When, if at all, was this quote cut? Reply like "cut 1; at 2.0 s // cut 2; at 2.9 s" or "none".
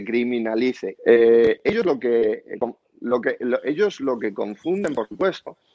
cut 1; at 0.9 s